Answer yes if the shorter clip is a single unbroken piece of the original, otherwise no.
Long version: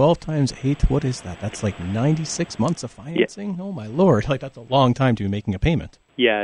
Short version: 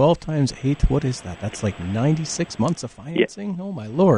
yes